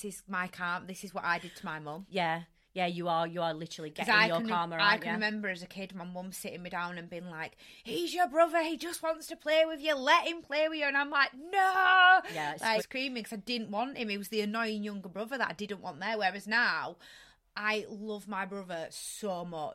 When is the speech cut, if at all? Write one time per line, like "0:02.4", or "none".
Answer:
0:12.8